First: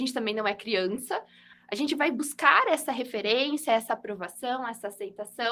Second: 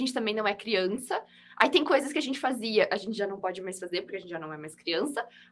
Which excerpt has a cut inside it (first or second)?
first